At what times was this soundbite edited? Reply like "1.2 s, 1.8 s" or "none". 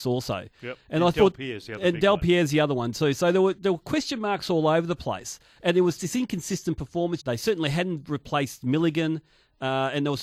6.0 s, 7.2 s